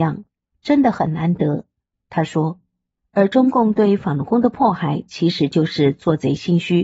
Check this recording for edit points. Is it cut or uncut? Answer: uncut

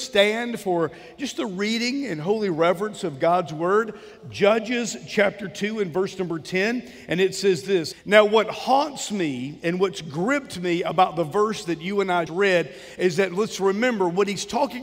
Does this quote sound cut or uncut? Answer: cut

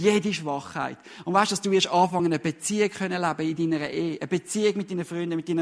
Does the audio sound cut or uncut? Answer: uncut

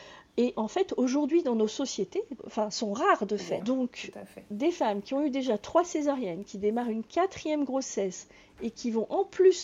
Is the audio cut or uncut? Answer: cut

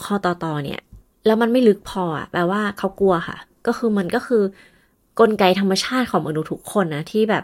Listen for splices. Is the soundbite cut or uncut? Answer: uncut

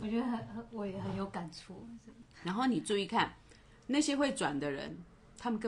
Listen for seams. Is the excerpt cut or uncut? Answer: uncut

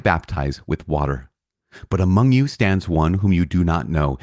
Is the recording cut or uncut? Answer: uncut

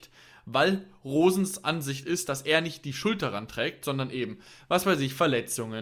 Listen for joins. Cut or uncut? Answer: uncut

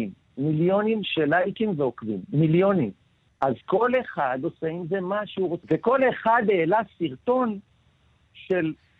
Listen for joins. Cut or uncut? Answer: cut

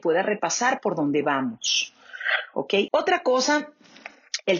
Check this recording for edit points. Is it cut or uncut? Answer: cut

